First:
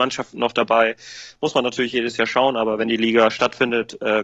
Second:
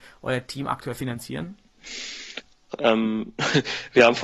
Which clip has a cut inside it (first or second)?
second